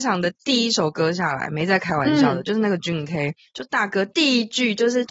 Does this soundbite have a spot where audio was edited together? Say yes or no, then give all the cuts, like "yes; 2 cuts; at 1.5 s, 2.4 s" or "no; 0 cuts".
no; 0 cuts